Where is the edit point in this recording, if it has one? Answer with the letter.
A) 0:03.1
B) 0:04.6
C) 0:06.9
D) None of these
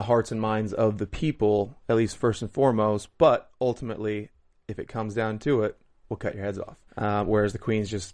C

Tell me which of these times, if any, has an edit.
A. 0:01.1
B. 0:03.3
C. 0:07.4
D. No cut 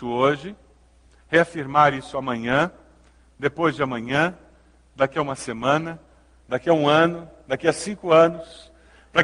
D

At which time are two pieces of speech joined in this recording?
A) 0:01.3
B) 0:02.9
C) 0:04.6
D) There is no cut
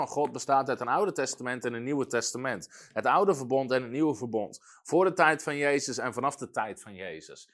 D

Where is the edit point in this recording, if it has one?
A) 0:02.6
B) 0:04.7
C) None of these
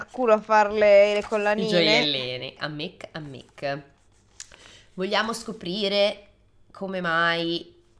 A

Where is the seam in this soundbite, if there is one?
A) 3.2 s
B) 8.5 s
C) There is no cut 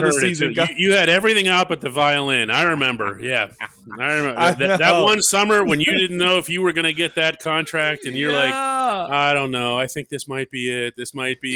C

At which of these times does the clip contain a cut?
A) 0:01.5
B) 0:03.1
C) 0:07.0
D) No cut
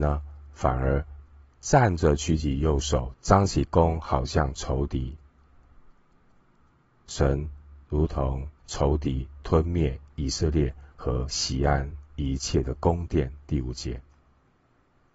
B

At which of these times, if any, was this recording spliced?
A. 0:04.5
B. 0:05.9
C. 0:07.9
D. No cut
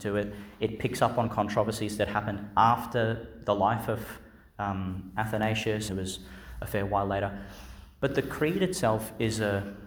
B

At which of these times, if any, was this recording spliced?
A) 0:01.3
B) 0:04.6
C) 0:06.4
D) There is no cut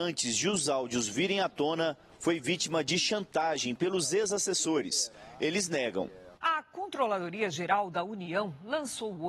C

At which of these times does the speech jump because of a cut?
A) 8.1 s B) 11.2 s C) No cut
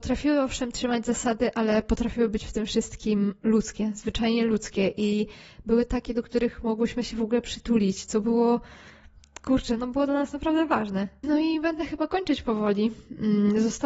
B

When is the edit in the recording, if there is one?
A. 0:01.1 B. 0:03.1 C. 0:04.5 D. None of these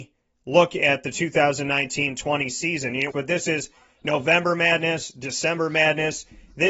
B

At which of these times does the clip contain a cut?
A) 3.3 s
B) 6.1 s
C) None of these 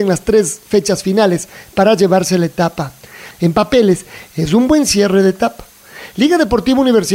A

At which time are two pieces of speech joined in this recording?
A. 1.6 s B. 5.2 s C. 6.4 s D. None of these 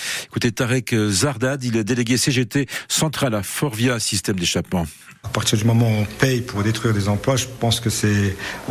B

